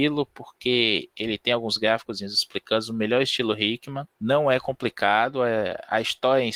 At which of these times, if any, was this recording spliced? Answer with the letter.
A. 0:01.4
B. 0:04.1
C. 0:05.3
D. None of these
B